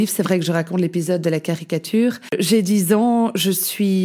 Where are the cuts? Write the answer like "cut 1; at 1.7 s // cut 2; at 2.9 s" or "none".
none